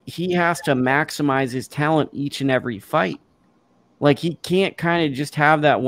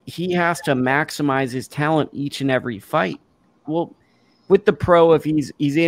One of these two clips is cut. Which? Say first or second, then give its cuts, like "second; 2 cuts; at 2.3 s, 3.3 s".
second; 1 cut; at 3.6 s